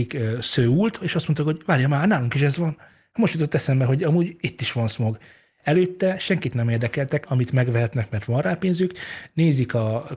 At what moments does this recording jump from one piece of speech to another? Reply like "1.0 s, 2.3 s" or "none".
1.0 s, 7.3 s

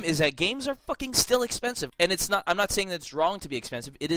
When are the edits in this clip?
1.9 s

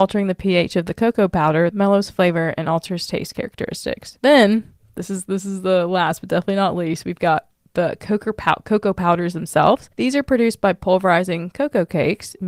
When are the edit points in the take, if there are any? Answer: 1.7 s

